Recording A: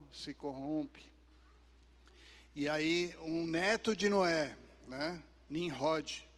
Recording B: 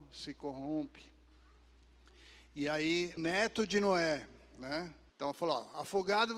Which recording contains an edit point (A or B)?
B